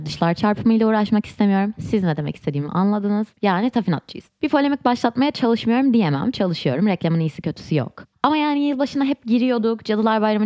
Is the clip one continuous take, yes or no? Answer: no